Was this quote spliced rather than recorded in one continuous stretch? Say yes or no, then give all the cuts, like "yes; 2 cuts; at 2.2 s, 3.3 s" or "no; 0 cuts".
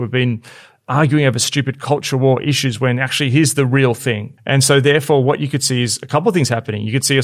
yes; 1 cut; at 4.4 s